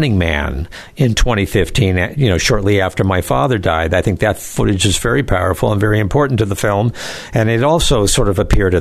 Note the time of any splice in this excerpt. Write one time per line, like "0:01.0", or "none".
none

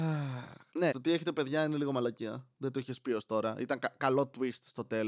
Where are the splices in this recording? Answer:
0:00.9

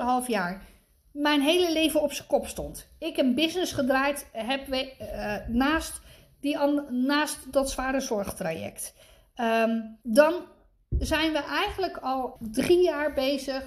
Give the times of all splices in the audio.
0:10.0
0:12.3

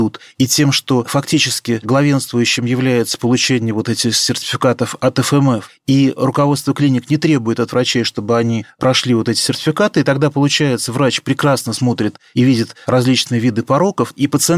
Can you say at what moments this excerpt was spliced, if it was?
none

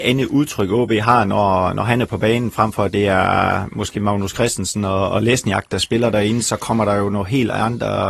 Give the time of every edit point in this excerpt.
none

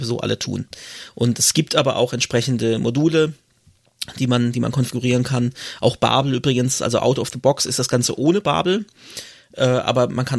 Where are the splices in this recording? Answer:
none

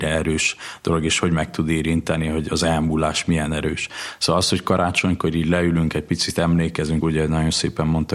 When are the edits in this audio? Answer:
0:07.0

